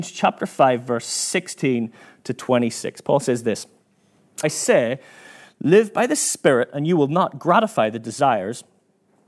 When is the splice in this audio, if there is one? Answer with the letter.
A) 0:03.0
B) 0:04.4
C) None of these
B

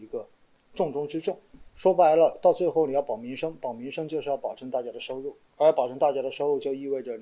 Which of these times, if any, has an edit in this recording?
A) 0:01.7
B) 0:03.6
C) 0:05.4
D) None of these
A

